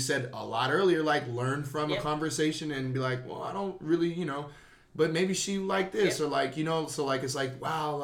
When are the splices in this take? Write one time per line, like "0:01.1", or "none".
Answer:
none